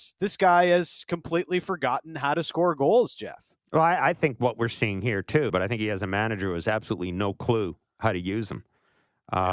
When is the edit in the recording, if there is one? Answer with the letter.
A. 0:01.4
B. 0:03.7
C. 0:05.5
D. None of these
C